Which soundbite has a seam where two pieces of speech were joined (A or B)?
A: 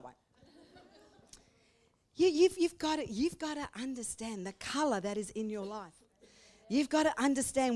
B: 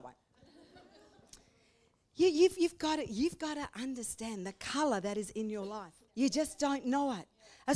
B